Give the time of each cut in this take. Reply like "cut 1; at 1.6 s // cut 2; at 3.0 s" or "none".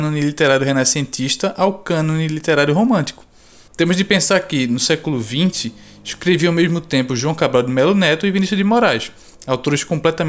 cut 1; at 3.7 s